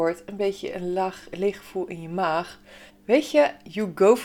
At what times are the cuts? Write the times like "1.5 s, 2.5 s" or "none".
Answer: 2.9 s